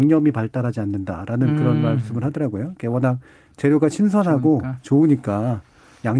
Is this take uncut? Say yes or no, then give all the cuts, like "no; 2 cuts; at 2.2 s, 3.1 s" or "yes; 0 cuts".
yes; 0 cuts